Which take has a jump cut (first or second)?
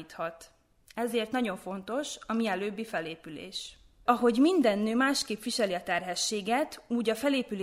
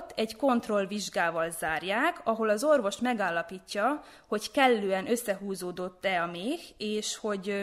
first